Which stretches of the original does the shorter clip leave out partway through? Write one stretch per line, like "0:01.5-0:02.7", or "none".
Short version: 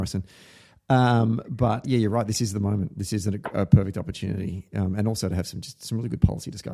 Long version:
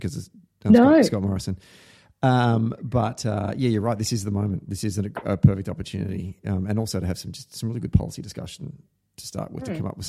0:03.2-0:03.5